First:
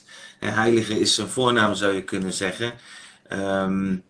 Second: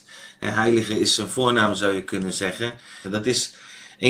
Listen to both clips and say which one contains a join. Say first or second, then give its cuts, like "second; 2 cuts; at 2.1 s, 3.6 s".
second; 1 cut; at 3.0 s